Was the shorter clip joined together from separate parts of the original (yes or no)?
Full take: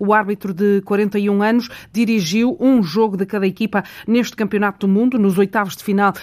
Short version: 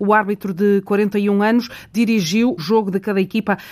yes